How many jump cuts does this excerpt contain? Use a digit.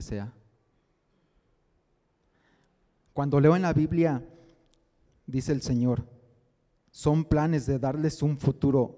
2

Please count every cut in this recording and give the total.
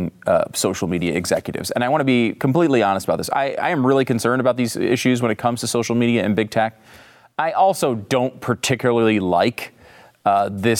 0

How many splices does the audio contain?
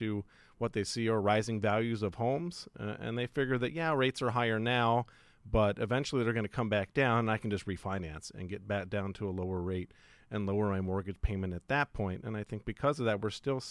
0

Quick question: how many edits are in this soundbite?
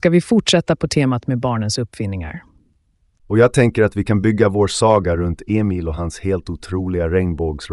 1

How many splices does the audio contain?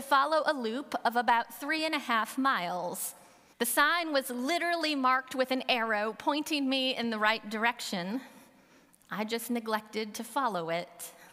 1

